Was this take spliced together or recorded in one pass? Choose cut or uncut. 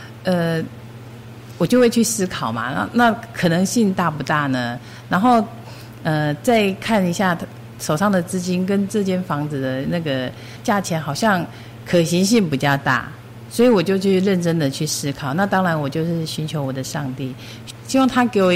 uncut